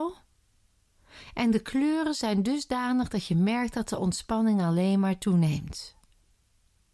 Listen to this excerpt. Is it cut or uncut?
uncut